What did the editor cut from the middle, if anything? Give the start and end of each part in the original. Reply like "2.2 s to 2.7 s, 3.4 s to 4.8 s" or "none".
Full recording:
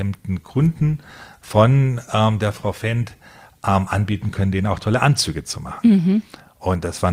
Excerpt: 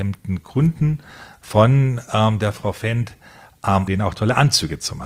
3.9 s to 4.5 s